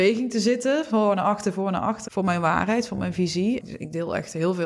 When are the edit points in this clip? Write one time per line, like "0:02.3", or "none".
0:02.1
0:03.6